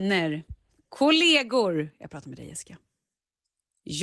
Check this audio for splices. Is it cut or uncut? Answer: uncut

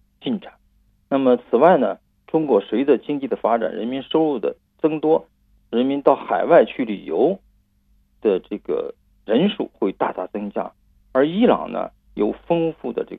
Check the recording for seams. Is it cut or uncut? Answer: uncut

